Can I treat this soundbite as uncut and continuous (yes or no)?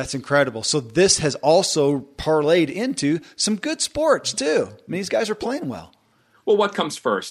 yes